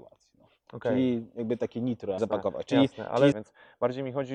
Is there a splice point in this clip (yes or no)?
yes